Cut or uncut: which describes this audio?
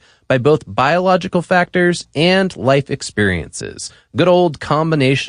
uncut